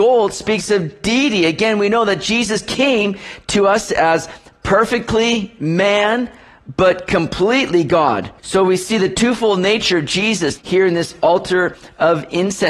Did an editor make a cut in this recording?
yes; 2 cuts; at 8.4 s, 10.6 s

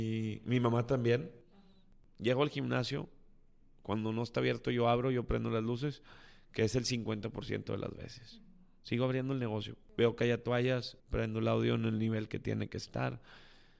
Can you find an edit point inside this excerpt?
yes; 1 cut; at 11.0 s

